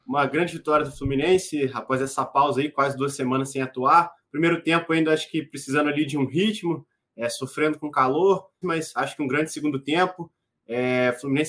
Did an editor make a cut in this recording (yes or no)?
yes